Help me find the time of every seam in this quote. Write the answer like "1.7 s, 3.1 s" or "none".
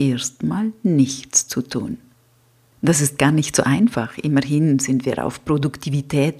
2.7 s